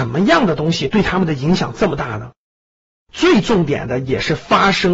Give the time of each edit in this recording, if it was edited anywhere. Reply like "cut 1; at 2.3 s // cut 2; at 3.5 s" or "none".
cut 1; at 3.0 s